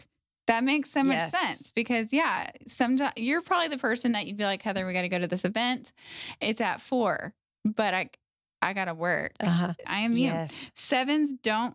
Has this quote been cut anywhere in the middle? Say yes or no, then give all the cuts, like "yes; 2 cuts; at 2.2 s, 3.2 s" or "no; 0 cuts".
yes; 2 cuts; at 7.5 s, 9.8 s